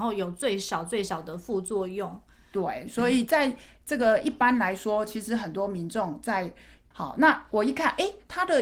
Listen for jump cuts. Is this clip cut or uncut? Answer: cut